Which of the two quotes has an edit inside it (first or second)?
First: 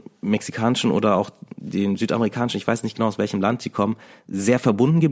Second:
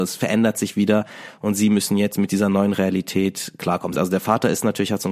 second